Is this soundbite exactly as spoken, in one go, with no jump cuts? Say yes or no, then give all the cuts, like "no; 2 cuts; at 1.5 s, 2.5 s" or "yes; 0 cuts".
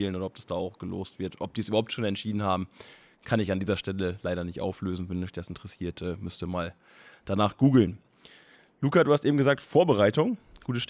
yes; 0 cuts